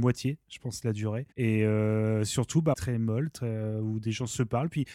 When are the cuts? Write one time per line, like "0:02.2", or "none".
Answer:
0:01.3
0:02.7